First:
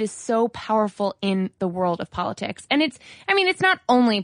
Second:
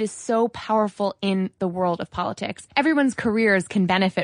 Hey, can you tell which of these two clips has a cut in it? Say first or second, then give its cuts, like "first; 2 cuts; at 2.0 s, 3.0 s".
second; 1 cut; at 2.7 s